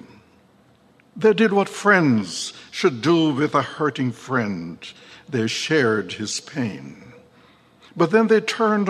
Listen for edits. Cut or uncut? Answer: uncut